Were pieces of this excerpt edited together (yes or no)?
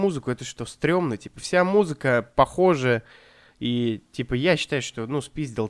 no